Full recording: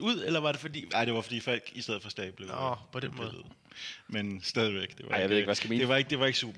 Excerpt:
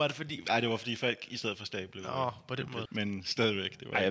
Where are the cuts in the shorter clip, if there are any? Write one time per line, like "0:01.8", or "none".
0:02.9